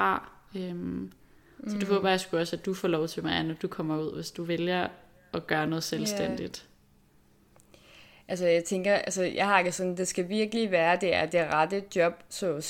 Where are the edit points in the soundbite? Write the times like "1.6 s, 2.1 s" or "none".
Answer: none